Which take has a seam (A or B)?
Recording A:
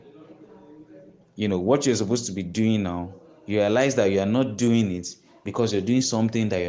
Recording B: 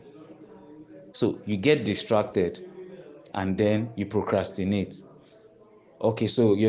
B